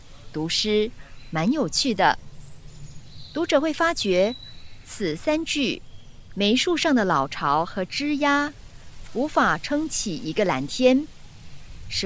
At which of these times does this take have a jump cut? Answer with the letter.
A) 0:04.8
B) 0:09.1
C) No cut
B